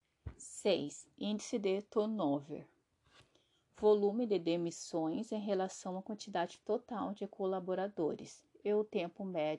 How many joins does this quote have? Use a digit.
1